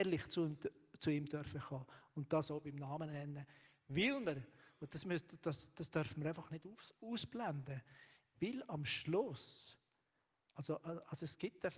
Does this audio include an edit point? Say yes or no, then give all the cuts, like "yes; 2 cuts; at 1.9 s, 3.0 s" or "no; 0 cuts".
no; 0 cuts